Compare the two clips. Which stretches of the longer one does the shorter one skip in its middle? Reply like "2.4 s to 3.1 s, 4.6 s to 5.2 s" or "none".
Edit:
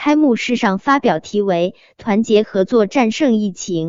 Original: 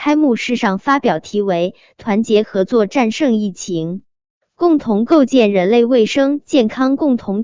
none